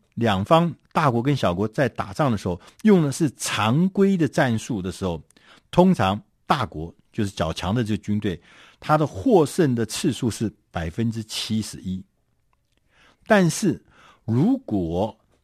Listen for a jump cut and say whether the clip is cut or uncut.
uncut